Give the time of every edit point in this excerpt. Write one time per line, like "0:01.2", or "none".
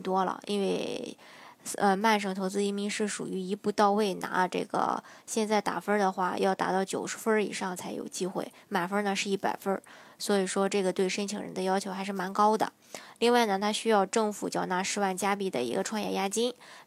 0:05.2